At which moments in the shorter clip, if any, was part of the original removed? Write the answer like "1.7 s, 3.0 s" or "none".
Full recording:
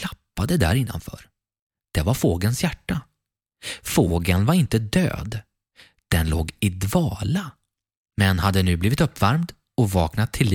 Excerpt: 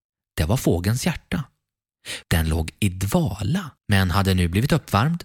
2.2 s, 3.8 s